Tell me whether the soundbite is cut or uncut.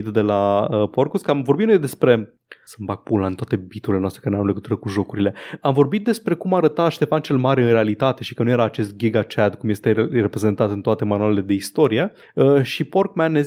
uncut